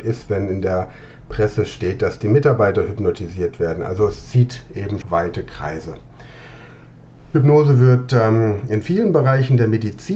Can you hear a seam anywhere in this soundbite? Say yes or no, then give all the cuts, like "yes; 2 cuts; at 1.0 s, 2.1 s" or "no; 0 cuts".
yes; 1 cut; at 5.0 s